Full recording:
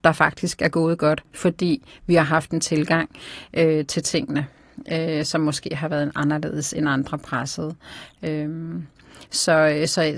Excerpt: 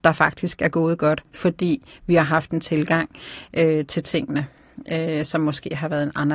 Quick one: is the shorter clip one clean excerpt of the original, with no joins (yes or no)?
yes